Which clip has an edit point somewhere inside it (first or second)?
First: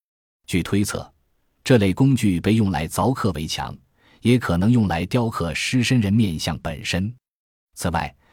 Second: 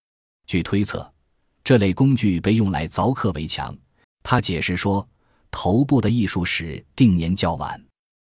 second